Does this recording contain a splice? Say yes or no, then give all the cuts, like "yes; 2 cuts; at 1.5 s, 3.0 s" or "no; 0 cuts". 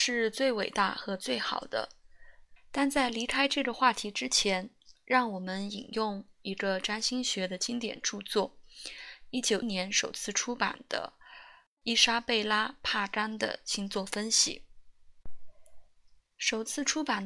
yes; 2 cuts; at 2.6 s, 9.6 s